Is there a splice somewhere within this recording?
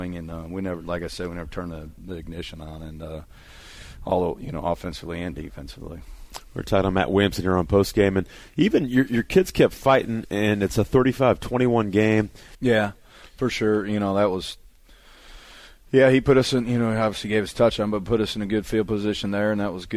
yes; 1 cut; at 12.5 s

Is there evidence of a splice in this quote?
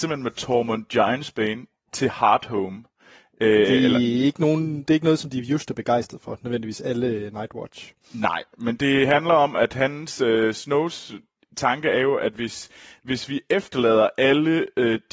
no; 0 cuts

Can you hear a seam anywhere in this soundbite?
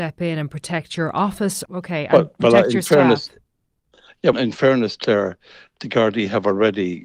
yes; 2 cuts; at 1.7 s, 4.3 s

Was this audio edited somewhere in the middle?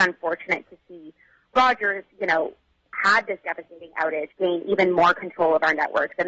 yes; 2 cuts; at 2.1 s, 4.3 s

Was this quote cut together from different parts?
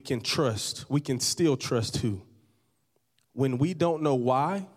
no; 0 cuts

